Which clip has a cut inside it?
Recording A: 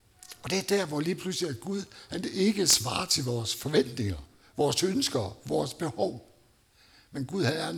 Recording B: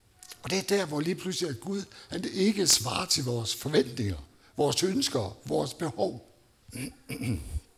B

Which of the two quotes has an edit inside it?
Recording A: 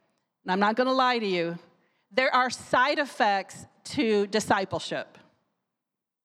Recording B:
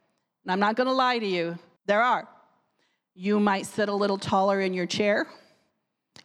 B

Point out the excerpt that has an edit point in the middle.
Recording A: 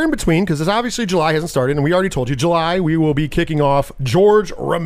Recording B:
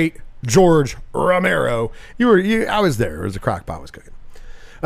B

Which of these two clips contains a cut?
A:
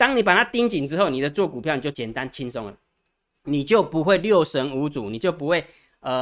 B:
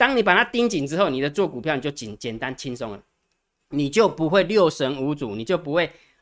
A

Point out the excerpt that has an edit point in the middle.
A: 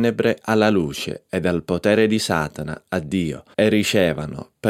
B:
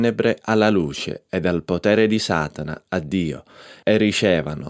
A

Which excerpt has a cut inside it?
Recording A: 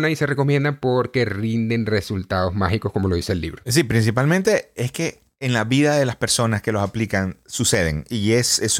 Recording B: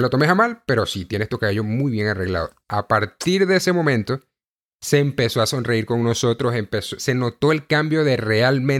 A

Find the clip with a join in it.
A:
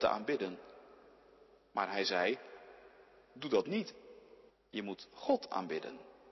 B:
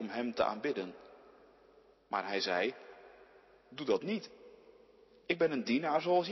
A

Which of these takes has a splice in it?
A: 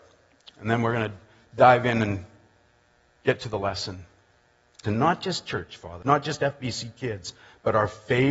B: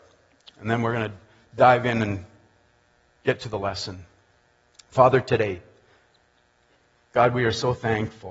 A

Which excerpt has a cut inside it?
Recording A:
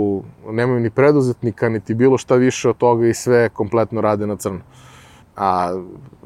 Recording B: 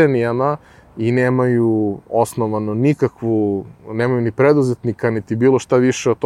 A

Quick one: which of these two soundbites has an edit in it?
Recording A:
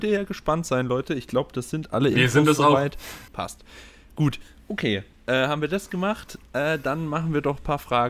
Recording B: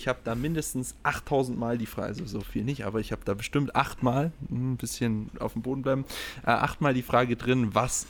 A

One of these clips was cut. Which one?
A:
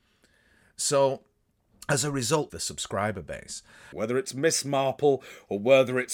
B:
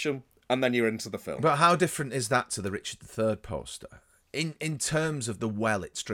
A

